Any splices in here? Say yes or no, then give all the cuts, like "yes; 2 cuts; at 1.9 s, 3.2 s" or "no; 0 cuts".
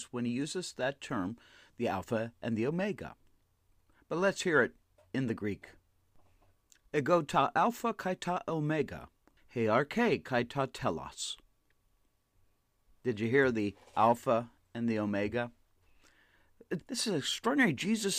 yes; 2 cuts; at 9.4 s, 16.8 s